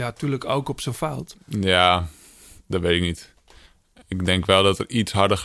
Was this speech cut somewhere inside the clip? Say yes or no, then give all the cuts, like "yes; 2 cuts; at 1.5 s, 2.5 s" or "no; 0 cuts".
yes; 2 cuts; at 1.3 s, 2.6 s